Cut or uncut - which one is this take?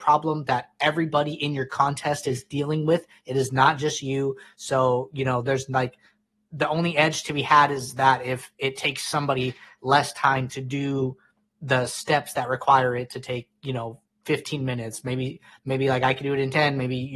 uncut